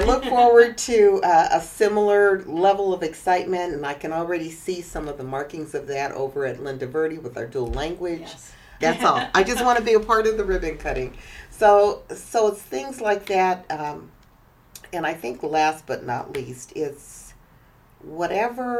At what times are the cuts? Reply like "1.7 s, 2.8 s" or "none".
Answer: 8.8 s